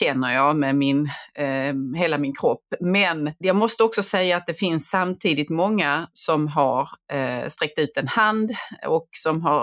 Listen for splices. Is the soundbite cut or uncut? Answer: cut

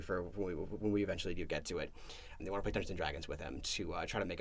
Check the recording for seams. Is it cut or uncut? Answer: cut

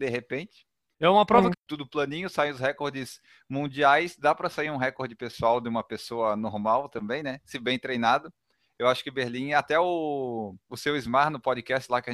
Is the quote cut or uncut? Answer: cut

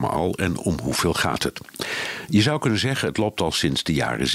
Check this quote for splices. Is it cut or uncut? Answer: uncut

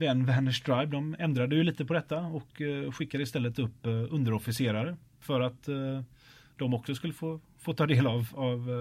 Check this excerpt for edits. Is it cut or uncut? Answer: uncut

